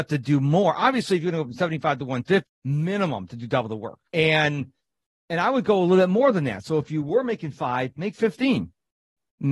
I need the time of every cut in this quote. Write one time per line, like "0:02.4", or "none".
0:02.5
0:04.1

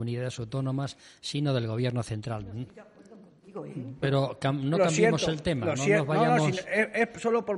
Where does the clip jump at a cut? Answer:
0:04.0

